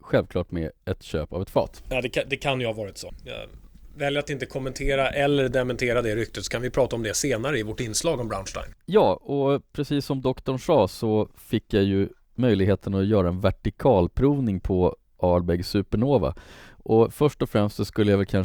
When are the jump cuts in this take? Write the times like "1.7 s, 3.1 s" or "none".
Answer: 8.7 s